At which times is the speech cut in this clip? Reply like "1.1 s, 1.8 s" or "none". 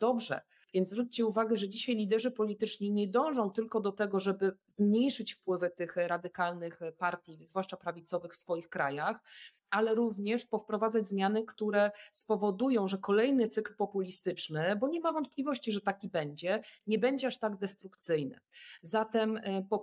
none